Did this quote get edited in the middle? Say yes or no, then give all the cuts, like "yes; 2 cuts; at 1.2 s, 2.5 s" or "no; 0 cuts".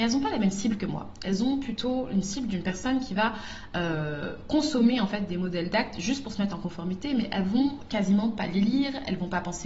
no; 0 cuts